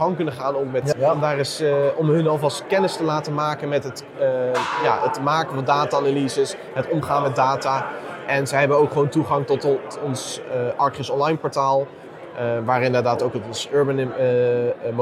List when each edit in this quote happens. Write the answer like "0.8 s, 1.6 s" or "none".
0.9 s, 9.6 s